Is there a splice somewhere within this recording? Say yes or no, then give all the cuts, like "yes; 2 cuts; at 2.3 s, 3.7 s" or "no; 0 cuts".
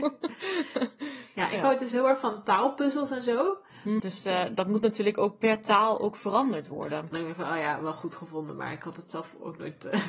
yes; 2 cuts; at 4.0 s, 7.1 s